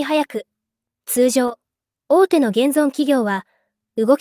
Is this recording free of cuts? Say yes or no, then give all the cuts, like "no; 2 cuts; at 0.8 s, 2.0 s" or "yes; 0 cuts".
yes; 0 cuts